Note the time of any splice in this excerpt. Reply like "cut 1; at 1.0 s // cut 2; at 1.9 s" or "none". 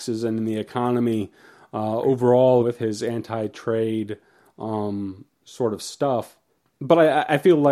cut 1; at 2.6 s